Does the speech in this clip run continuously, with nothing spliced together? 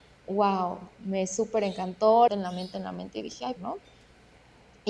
no; 2 cuts; at 2.3 s, 3.6 s

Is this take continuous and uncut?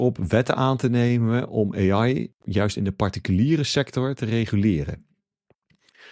yes; 0 cuts

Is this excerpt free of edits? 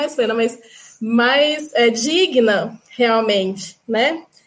yes; 0 cuts

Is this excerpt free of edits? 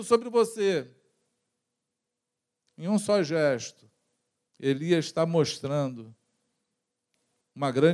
yes; 0 cuts

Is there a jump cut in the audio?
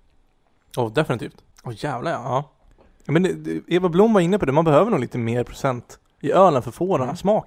no; 0 cuts

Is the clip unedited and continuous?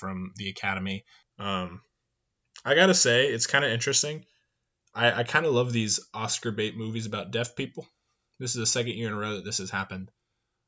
no; 1 cut; at 1.2 s

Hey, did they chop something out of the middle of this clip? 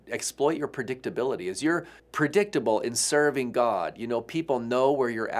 yes; 1 cut; at 2.0 s

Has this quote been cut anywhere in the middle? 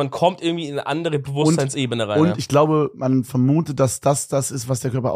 no; 0 cuts

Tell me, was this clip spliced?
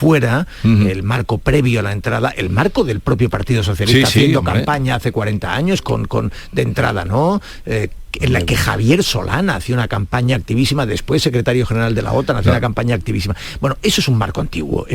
no; 0 cuts

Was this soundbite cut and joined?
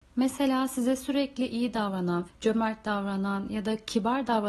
yes; 1 cut; at 2.3 s

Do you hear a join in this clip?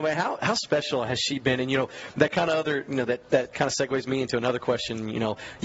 no; 0 cuts

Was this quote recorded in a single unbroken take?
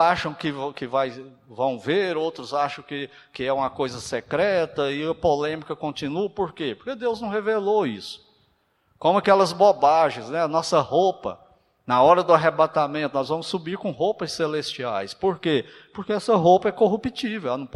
yes; 0 cuts

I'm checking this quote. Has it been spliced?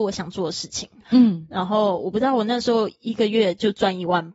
yes; 1 cut; at 1.0 s

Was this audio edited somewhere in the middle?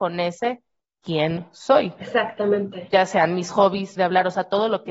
yes; 1 cut; at 4.0 s

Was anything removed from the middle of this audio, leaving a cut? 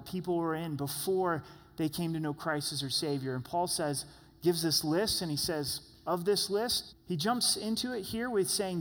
yes; 1 cut; at 6.9 s

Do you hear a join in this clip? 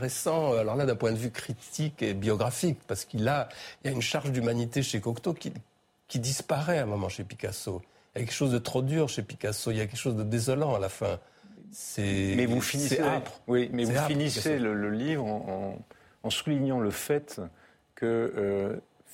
no; 0 cuts

